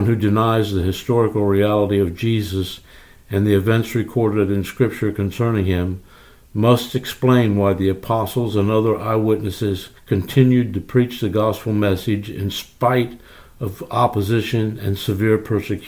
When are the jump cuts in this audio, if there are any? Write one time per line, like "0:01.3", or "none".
0:10.0